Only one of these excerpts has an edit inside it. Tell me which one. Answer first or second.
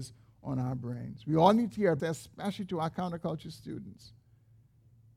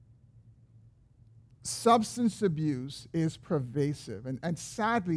first